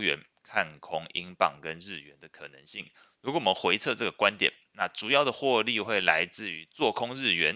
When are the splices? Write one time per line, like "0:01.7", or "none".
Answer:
0:04.7